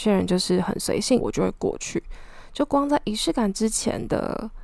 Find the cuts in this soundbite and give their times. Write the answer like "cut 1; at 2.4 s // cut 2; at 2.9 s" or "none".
cut 1; at 1.2 s